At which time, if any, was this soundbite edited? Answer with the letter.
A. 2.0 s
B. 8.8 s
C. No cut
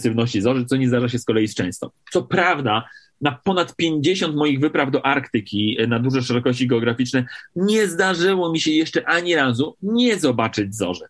A